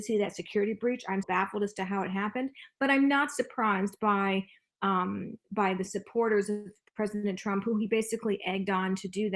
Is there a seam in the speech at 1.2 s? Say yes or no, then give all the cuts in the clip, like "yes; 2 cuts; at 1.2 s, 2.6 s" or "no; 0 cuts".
yes; 1 cut; at 1.2 s